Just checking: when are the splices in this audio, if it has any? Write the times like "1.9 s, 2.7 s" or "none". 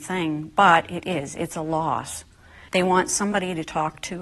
2.7 s